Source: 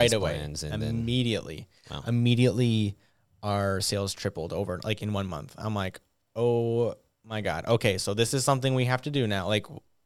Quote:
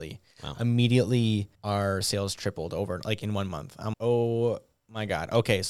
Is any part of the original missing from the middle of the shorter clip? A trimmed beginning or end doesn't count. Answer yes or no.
yes